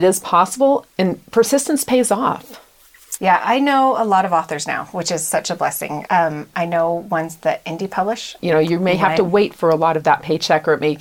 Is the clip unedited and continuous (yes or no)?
no